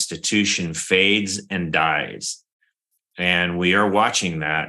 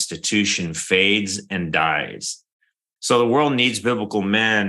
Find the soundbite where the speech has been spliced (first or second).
second